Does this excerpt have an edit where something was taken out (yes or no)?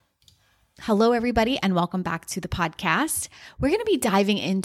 no